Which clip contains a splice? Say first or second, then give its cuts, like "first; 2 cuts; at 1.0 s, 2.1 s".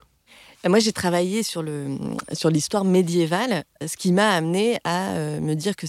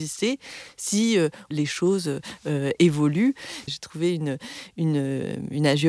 second; 2 cuts; at 1.5 s, 3.7 s